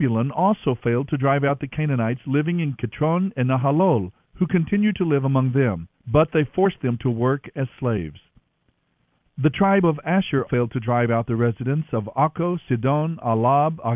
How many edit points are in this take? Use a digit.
1